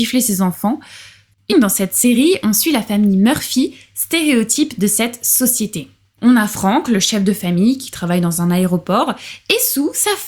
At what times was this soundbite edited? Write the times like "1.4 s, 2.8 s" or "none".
1.5 s

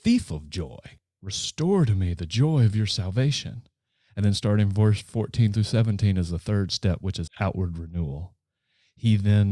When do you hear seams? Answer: 7.3 s

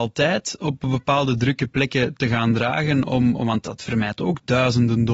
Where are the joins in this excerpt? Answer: none

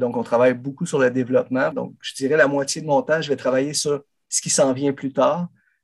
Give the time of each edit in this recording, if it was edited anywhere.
1.7 s

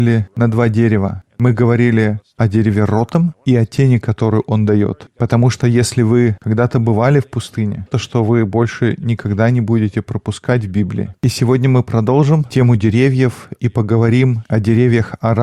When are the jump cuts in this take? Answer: 7.9 s, 11.1 s

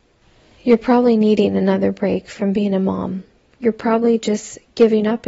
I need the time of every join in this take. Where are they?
3.5 s

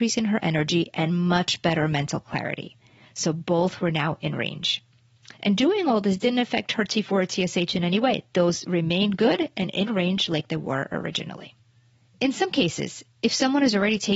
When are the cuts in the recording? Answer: 3.0 s

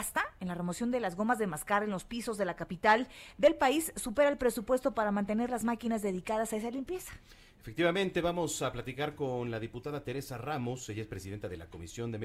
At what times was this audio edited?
none

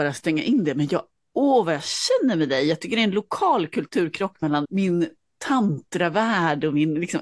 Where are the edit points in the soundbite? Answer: 4.6 s

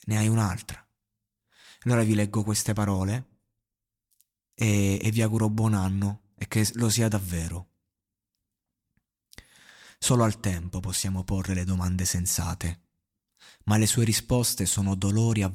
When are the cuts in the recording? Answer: none

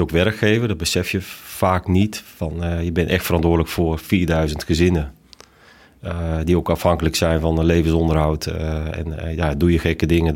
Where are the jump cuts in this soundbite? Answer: none

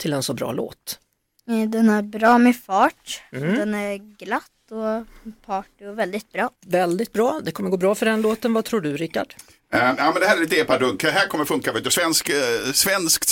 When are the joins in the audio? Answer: 6.6 s

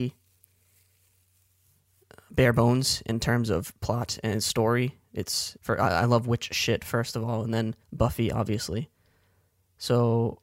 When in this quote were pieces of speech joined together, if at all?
5.6 s, 7.8 s

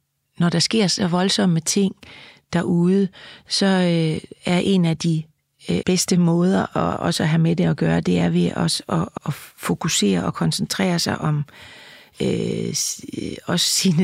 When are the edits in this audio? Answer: 5.8 s, 9.2 s

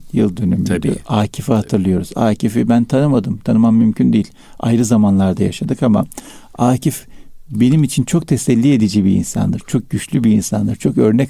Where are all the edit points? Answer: none

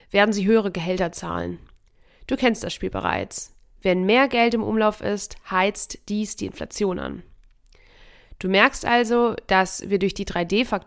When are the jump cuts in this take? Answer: none

